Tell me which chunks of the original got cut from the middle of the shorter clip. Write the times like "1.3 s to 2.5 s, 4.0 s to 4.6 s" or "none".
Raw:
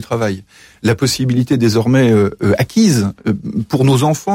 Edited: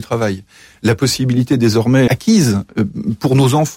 2.1 s to 2.6 s